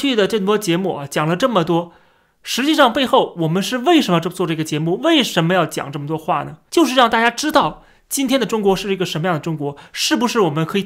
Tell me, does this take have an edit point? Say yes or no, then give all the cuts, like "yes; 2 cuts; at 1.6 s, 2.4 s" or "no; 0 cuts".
no; 0 cuts